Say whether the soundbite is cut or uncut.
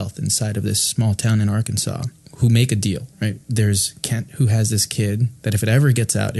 uncut